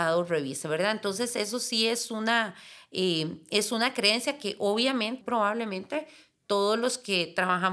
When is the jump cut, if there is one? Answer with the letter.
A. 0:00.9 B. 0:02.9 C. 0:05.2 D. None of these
C